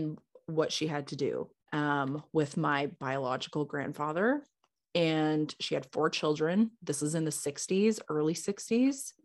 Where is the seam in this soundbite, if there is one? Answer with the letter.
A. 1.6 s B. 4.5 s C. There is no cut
A